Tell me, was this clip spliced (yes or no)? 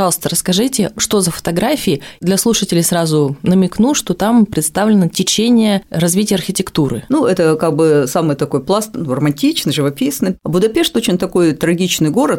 yes